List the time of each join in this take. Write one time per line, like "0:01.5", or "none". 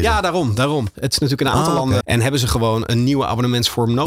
0:00.9
0:02.0

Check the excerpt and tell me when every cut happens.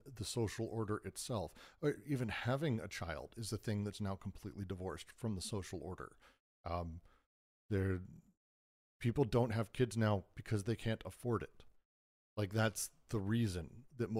none

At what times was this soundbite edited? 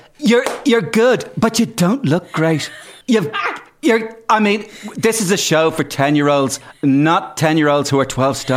0:03.0

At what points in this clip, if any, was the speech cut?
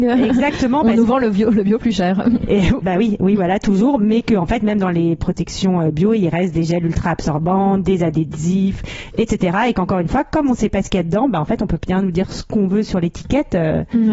0:02.8

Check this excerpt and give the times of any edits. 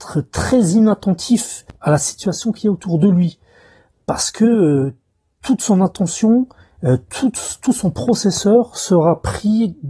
none

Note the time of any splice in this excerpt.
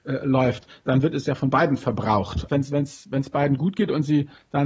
0:02.5

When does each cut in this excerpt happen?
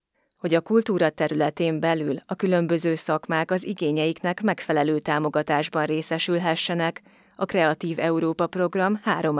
none

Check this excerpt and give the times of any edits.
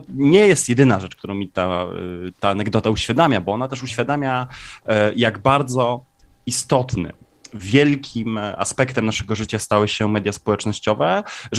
none

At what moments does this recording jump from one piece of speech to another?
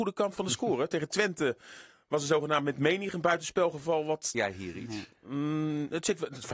0:04.3

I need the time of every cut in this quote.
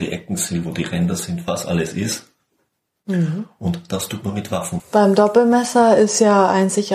0:04.8

